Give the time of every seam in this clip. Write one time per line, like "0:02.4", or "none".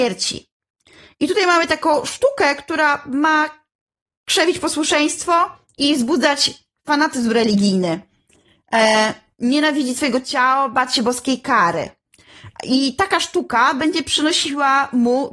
none